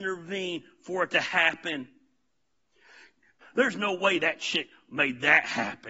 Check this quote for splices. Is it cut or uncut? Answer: cut